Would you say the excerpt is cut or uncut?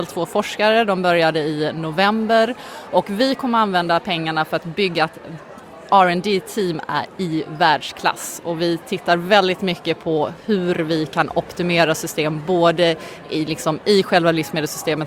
uncut